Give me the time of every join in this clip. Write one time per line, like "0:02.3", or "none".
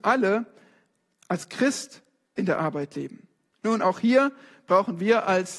0:03.5